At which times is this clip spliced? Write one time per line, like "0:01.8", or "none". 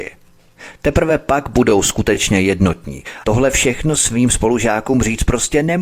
0:03.2